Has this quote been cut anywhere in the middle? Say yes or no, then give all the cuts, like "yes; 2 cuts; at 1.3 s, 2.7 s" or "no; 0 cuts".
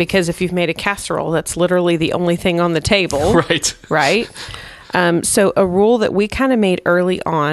no; 0 cuts